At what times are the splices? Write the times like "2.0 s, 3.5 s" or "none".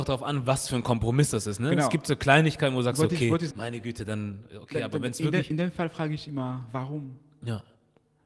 3.5 s